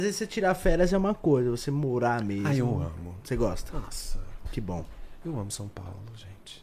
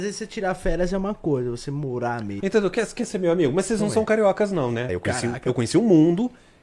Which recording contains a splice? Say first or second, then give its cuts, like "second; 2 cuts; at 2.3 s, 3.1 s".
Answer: second; 2 cuts; at 2.4 s, 4.9 s